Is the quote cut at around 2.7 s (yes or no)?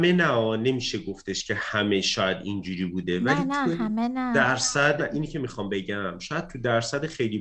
no